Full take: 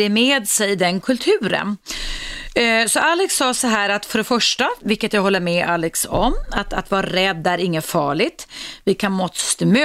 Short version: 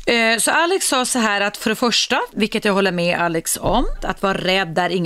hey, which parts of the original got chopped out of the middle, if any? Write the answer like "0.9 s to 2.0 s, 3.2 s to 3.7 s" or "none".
6.5 s to 6.7 s